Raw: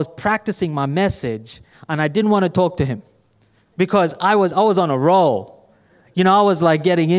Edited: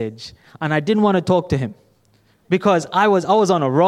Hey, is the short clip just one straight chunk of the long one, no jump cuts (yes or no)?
yes